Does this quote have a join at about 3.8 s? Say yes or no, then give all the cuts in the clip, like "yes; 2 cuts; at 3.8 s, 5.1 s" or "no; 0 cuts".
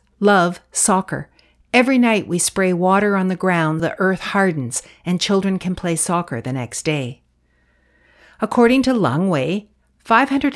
yes; 1 cut; at 3.8 s